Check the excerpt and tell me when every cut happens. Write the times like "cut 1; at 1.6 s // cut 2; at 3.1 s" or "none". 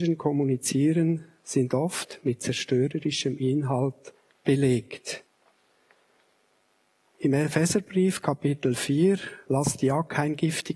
cut 1; at 9.4 s